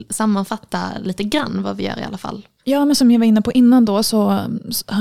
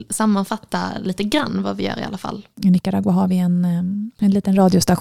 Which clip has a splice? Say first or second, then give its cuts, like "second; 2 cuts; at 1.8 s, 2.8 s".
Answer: second; 1 cut; at 2.5 s